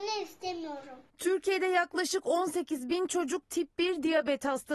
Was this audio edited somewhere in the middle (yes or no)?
no